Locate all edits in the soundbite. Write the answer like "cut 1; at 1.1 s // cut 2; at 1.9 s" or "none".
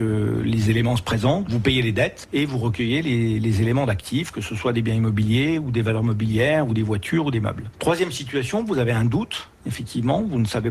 none